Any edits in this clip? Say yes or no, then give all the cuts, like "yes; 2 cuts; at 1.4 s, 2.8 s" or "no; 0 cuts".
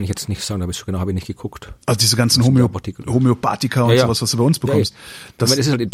no; 0 cuts